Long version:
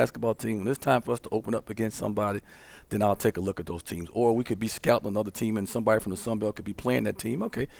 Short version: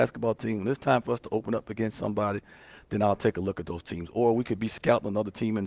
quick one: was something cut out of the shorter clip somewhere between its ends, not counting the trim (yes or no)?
no